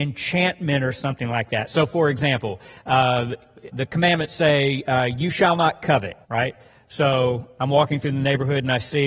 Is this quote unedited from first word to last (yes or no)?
no